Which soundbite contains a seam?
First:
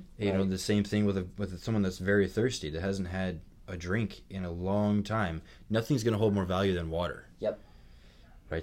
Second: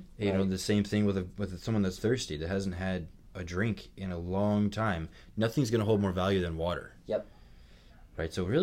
second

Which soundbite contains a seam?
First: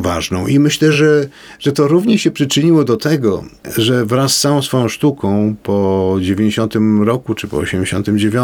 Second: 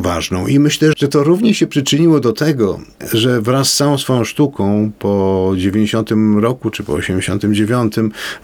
second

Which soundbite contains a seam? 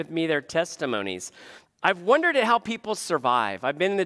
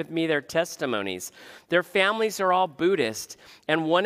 first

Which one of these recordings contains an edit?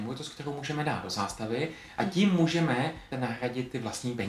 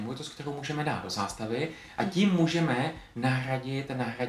first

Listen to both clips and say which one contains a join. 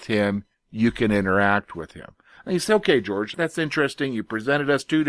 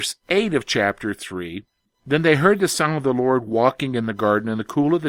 first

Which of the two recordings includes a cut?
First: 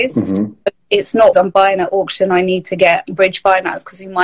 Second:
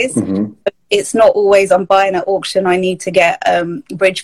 first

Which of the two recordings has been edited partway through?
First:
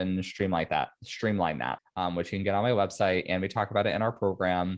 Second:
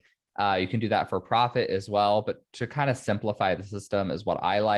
first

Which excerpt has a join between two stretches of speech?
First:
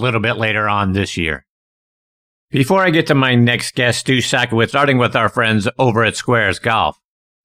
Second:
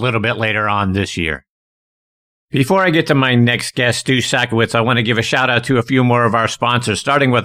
first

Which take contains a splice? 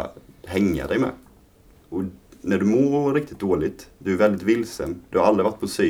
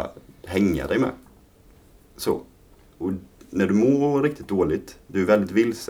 first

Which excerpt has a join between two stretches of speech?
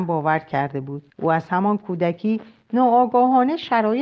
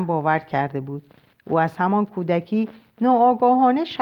first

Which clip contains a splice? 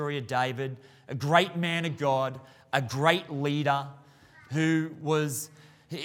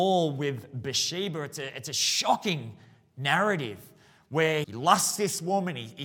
second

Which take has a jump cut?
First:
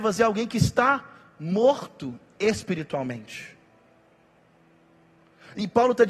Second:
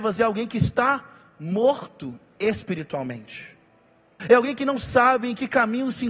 second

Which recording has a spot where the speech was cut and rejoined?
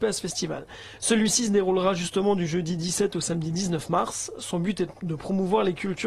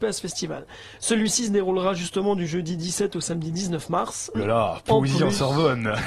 second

